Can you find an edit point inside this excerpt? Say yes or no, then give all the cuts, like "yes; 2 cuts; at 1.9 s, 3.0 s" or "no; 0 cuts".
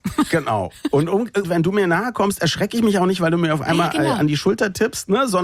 yes; 1 cut; at 1.4 s